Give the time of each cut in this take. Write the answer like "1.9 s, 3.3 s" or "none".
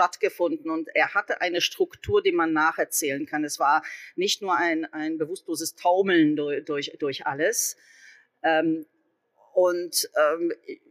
none